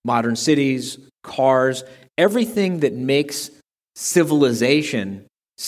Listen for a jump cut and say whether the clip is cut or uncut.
uncut